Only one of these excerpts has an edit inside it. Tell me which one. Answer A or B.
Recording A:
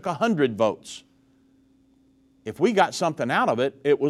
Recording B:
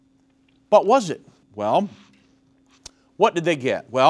B